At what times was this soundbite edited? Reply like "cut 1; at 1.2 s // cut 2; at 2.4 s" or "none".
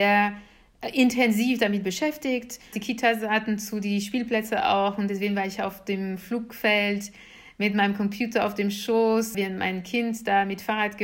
cut 1; at 2.7 s // cut 2; at 9.3 s